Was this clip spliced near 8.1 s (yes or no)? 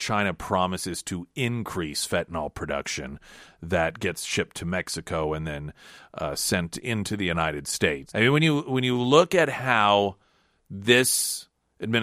yes